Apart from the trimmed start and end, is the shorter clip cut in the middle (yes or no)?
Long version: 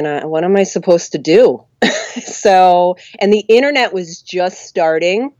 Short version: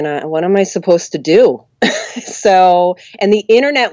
no